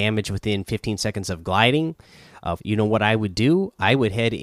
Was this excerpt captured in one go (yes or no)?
no